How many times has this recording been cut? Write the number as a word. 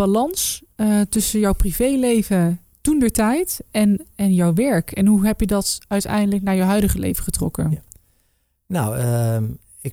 zero